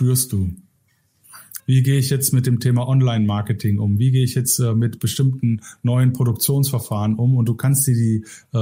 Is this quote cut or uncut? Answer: cut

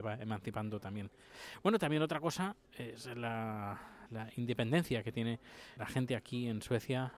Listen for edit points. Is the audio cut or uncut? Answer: cut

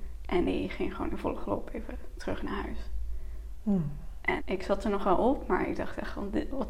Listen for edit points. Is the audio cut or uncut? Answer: cut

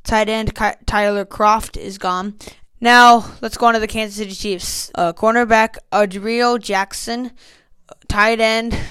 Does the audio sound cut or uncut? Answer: cut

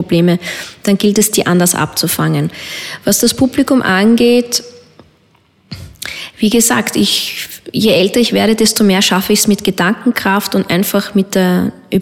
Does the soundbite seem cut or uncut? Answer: uncut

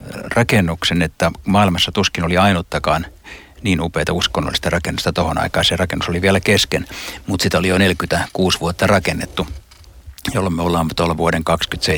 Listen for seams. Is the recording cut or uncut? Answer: uncut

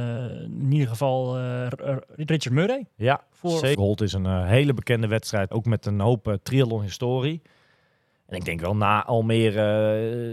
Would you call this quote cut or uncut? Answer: cut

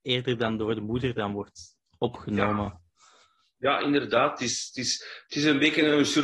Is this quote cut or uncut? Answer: uncut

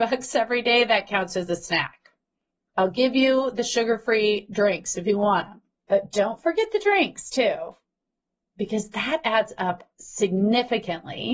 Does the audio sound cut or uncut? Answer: cut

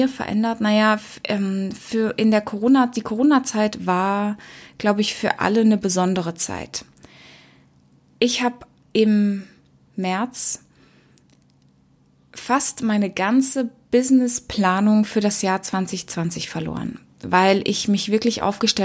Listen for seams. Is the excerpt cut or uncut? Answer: uncut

